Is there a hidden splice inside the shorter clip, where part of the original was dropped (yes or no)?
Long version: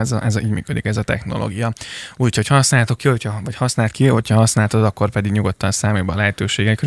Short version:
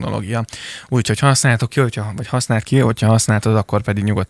no